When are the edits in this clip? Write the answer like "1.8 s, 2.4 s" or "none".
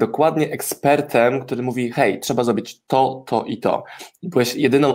none